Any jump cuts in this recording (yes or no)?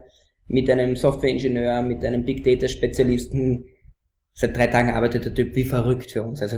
no